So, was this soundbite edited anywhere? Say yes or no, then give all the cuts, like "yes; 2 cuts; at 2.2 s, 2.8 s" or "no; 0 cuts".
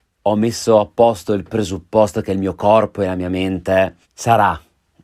yes; 1 cut; at 4.0 s